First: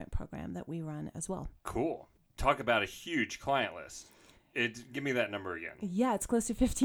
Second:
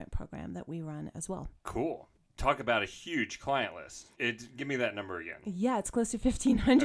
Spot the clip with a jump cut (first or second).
second